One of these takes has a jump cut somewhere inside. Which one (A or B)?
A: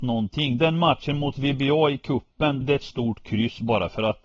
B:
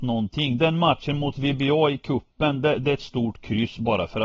A